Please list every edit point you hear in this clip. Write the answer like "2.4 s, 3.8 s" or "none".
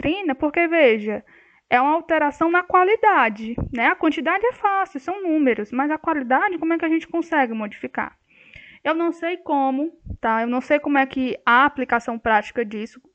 none

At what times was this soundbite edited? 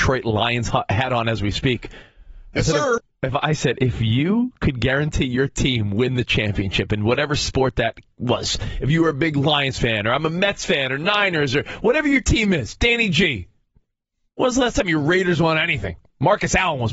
none

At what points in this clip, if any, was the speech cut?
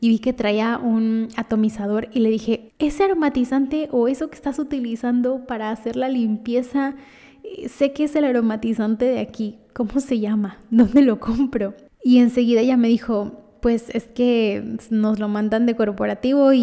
2.7 s

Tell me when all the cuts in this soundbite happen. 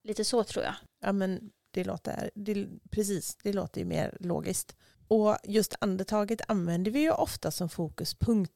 none

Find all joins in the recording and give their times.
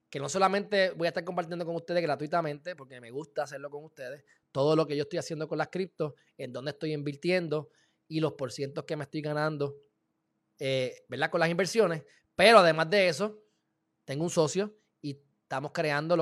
none

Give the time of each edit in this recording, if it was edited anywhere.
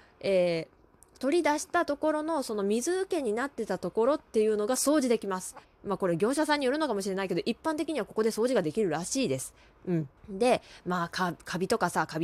5.6 s, 10.2 s

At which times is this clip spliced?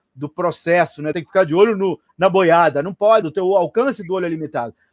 1.1 s, 3.2 s

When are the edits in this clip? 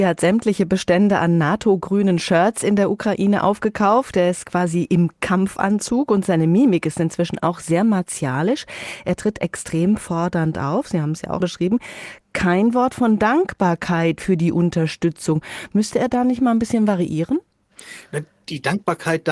11.4 s

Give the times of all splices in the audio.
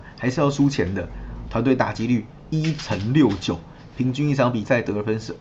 1.5 s

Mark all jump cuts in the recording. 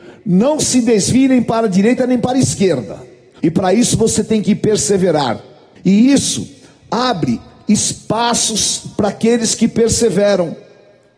3.4 s, 5.8 s

